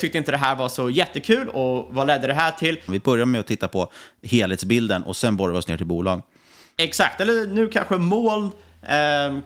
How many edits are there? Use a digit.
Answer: 1